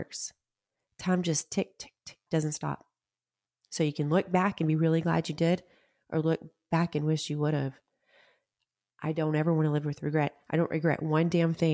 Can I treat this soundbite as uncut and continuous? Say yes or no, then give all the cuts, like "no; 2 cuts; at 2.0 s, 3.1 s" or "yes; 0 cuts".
no; 1 cut; at 2.3 s